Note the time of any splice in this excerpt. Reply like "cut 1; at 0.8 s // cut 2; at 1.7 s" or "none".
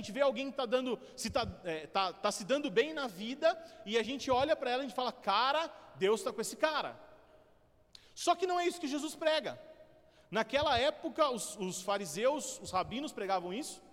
none